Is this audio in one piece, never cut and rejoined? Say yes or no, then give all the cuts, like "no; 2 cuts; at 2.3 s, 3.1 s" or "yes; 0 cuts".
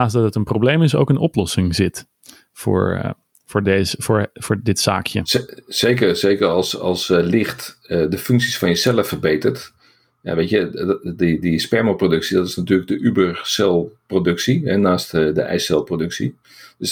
yes; 0 cuts